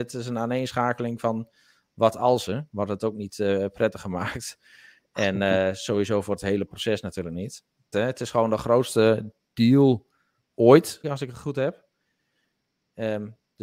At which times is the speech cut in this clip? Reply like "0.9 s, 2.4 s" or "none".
7.9 s, 11.0 s